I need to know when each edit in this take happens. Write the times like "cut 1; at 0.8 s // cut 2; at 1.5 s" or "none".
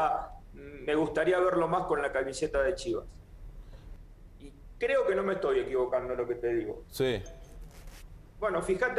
cut 1; at 6.9 s